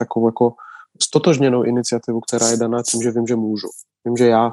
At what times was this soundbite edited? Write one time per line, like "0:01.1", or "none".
none